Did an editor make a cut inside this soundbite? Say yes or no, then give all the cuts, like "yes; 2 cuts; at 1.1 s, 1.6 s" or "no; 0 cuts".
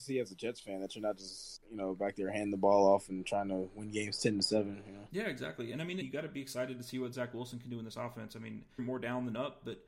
yes; 2 cuts; at 6.0 s, 8.8 s